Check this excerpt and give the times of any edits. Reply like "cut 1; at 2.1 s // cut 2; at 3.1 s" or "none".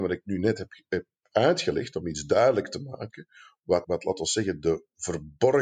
cut 1; at 3.8 s